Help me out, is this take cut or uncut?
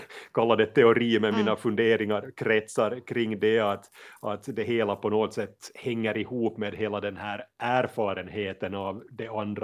uncut